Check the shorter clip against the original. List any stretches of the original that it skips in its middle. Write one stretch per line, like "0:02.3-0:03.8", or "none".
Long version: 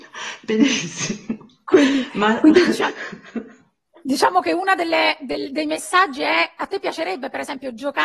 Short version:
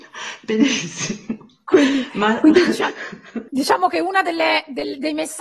0:03.5-0:04.0